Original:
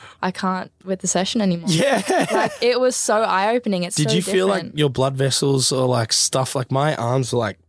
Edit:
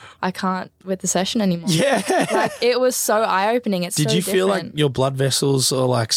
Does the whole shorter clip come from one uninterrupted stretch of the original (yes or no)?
yes